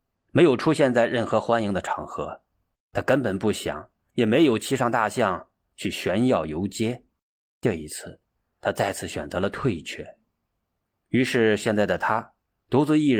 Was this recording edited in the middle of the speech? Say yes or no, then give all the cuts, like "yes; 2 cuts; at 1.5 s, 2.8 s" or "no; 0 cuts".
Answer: yes; 2 cuts; at 2.7 s, 8.5 s